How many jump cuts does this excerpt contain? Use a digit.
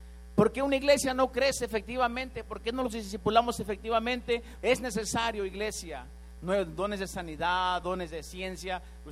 3